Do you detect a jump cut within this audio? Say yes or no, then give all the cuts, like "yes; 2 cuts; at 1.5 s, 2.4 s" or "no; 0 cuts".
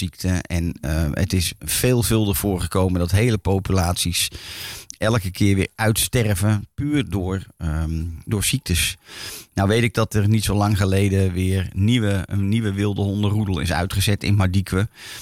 no; 0 cuts